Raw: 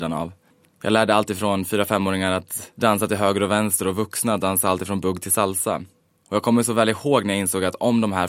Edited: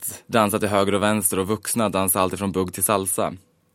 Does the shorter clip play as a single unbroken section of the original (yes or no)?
yes